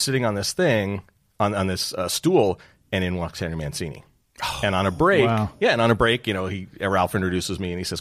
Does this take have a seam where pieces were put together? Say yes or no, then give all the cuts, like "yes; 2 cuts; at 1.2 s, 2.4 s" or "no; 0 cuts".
no; 0 cuts